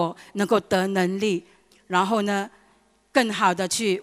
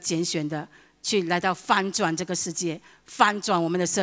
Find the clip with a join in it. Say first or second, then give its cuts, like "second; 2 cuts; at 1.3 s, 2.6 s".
first; 1 cut; at 1.7 s